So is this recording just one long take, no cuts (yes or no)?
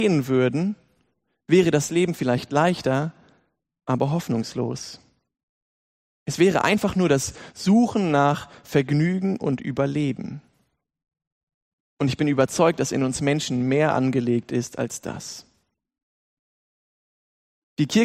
yes